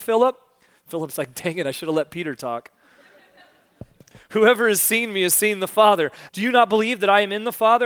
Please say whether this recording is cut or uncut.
cut